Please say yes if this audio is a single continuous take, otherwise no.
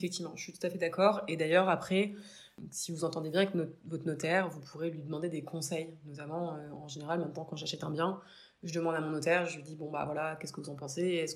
yes